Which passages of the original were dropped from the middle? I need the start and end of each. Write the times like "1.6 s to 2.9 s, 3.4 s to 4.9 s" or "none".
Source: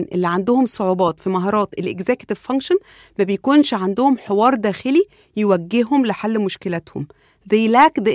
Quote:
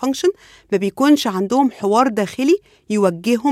none